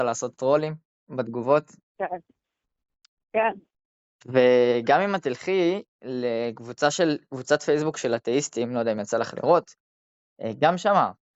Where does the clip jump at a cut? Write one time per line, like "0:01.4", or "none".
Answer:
none